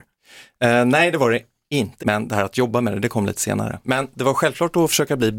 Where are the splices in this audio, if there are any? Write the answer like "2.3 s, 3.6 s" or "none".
2.0 s, 3.8 s